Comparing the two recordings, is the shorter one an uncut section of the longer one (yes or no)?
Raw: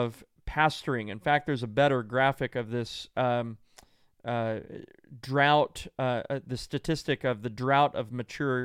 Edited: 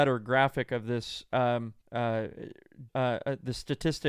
no